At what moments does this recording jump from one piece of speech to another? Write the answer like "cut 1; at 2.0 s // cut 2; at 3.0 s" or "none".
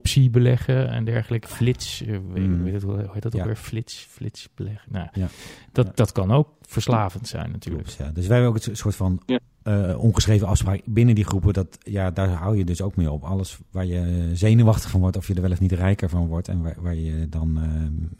cut 1; at 1.5 s